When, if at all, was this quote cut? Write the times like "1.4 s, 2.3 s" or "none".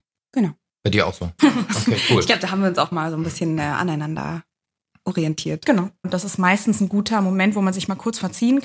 1.4 s, 6.0 s